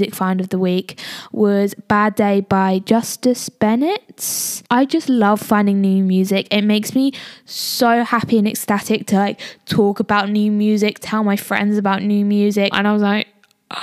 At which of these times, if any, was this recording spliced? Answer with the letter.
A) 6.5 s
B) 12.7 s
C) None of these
B